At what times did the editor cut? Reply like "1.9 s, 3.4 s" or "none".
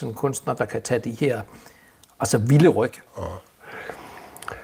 3.1 s